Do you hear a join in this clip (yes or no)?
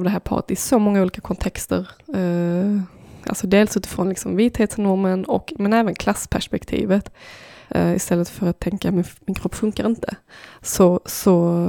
yes